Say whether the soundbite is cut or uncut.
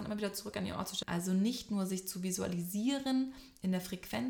cut